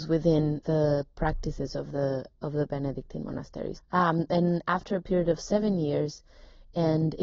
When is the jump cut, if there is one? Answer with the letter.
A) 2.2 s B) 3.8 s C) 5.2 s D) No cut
B